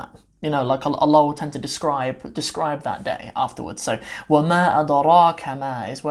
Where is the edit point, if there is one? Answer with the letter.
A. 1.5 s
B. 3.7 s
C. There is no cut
C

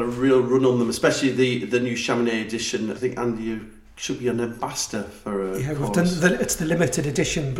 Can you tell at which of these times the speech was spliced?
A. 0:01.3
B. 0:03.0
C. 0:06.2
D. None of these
B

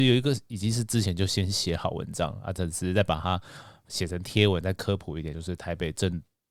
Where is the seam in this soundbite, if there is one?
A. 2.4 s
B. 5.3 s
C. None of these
C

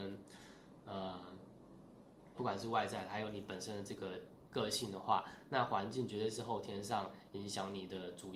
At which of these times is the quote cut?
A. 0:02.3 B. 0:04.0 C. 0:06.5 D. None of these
A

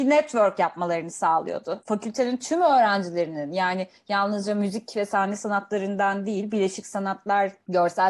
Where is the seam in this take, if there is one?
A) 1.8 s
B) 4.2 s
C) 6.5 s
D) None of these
A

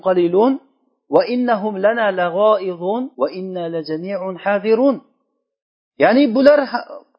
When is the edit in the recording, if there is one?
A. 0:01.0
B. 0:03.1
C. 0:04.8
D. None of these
B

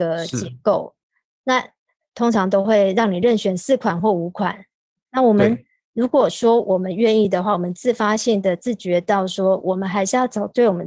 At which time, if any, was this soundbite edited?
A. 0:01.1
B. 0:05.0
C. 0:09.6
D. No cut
D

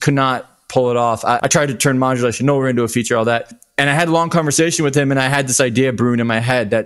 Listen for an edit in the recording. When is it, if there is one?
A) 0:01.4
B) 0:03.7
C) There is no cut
A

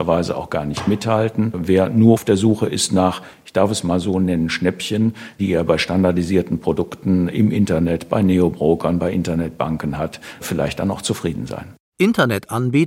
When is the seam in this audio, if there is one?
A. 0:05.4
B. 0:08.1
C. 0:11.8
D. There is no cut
A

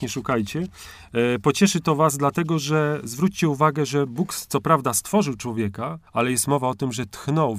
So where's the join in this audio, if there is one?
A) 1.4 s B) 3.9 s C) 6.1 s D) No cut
C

